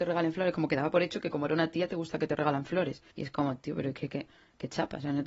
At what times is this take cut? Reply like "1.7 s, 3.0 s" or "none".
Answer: 3.1 s